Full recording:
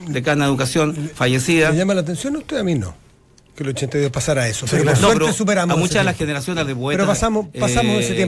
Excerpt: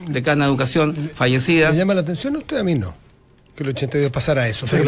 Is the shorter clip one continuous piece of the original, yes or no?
yes